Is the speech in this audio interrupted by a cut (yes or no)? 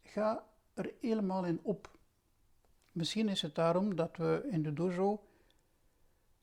no